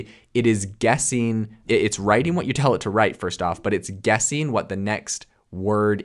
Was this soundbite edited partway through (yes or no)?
yes